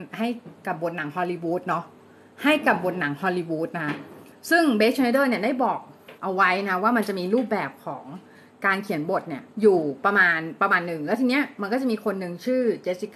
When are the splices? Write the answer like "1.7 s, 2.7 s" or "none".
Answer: 6.2 s, 9.5 s